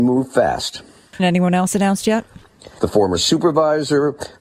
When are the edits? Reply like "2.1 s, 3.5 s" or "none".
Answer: 1.2 s, 2.8 s